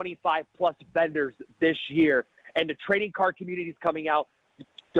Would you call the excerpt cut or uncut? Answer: uncut